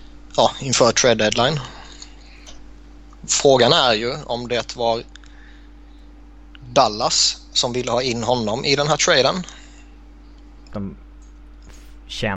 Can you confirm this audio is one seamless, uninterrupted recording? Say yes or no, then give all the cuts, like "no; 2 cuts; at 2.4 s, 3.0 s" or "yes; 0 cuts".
no; 2 cuts; at 3.2 s, 10.7 s